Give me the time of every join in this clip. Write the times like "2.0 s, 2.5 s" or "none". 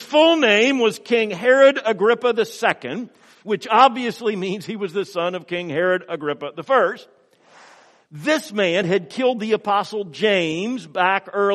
8.8 s